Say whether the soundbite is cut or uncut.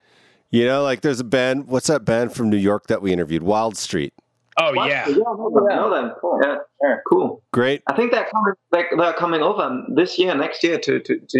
uncut